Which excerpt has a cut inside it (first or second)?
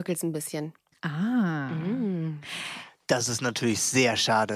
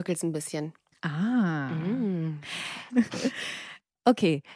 second